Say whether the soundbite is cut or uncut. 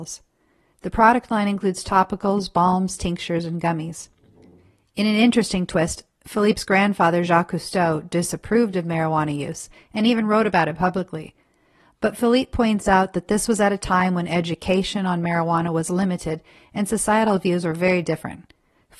uncut